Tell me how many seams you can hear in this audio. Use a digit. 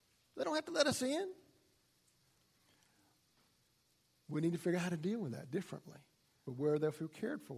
1